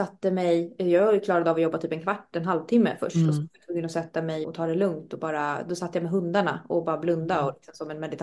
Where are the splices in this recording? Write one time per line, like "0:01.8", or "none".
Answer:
0:04.4

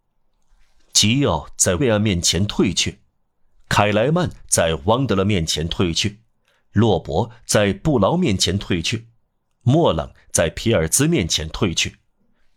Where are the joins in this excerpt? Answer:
0:01.8

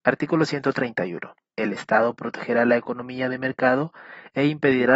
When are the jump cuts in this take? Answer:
0:01.5

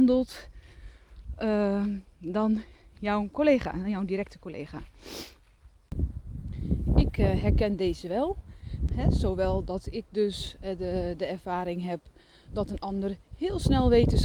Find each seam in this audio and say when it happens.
0:08.9

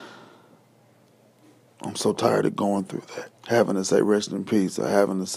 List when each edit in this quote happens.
0:01.7
0:03.4

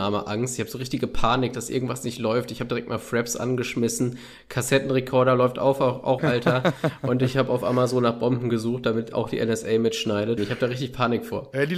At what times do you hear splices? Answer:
0:06.2
0:10.4

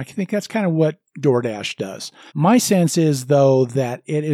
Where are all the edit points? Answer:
0:01.1
0:02.3

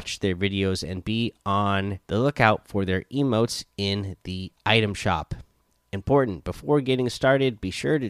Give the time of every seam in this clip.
0:02.0

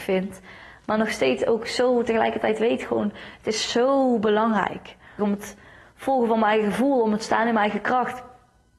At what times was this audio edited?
0:05.2

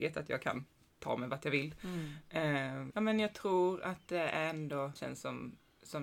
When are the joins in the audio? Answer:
0:02.9
0:05.0

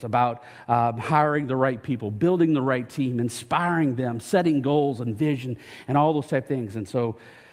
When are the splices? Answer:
none

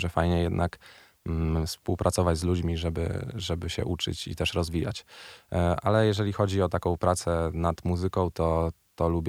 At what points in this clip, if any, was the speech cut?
none

